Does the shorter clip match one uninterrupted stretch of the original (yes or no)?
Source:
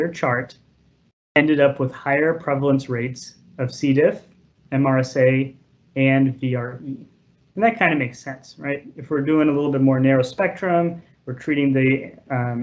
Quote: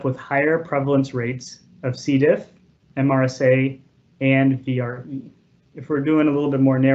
no